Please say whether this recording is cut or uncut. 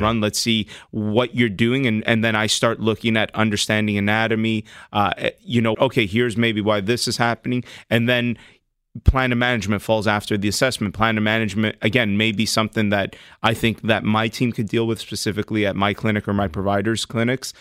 cut